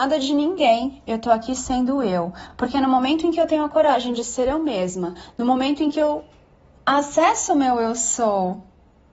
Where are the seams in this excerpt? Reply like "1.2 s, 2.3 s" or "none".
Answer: none